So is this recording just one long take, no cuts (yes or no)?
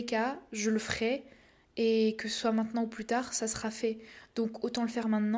yes